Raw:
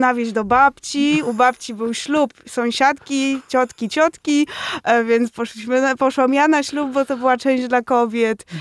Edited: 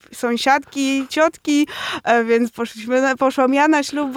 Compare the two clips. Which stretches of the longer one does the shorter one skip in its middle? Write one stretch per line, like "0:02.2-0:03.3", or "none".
0:03.4-0:03.9